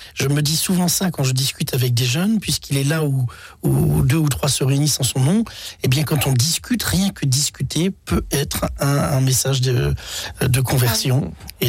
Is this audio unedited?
yes; 0 cuts

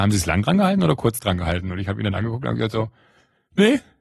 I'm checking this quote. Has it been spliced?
no; 0 cuts

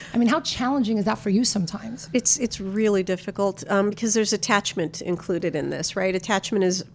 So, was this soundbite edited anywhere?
no; 0 cuts

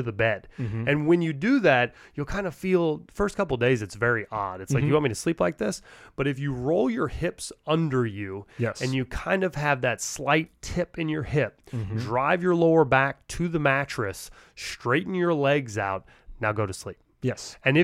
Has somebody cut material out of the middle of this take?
no; 0 cuts

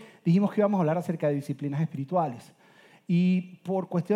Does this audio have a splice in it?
no; 0 cuts

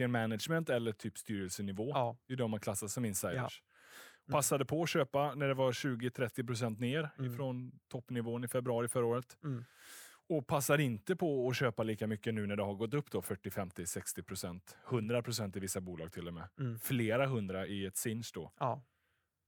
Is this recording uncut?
no; 1 cut; at 4.3 s

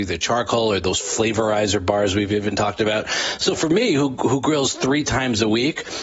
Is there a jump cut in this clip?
no; 0 cuts

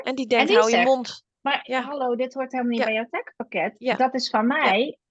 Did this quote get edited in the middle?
yes; 1 cut; at 1.3 s

